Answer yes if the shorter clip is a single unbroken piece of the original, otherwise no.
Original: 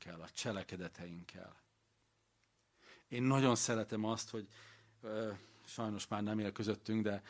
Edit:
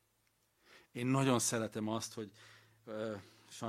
yes